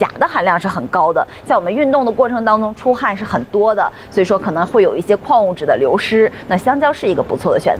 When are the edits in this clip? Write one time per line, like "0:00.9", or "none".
none